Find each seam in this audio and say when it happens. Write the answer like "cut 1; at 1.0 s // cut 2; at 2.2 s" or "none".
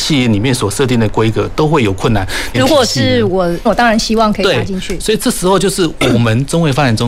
cut 1; at 2.5 s // cut 2; at 3.7 s